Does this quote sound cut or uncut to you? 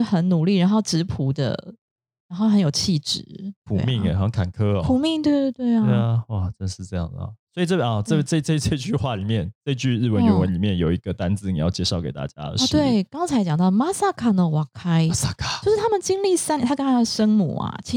uncut